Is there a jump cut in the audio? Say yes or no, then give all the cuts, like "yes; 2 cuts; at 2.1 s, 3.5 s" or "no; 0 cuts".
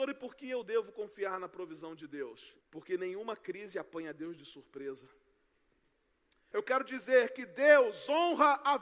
yes; 2 cuts; at 2.6 s, 6.5 s